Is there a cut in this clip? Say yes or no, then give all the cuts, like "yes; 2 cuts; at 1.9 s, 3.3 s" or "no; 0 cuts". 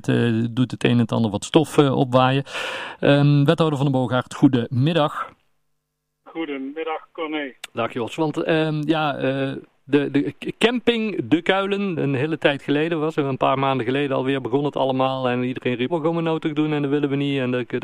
yes; 2 cuts; at 12.0 s, 15.9 s